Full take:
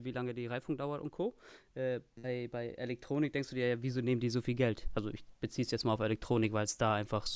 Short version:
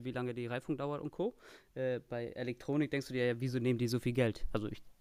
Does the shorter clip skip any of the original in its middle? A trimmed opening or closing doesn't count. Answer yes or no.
yes